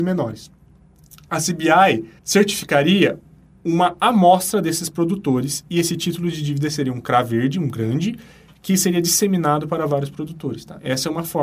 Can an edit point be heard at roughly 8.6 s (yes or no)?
no